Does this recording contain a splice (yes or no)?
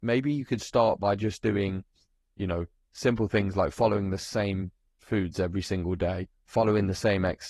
no